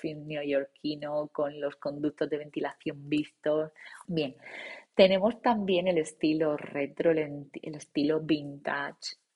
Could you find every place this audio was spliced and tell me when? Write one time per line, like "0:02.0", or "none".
0:04.1